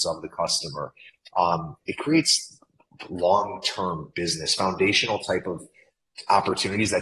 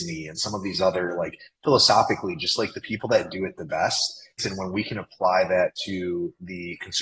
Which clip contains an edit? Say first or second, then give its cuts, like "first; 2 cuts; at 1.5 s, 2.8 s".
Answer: second; 1 cut; at 4.4 s